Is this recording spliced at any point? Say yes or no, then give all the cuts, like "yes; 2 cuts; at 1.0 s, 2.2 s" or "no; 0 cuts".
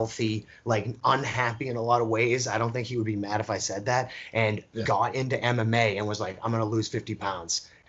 no; 0 cuts